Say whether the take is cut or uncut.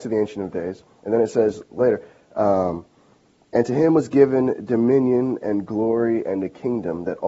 uncut